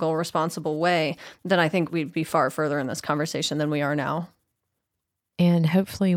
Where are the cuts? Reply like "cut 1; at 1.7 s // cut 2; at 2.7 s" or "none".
none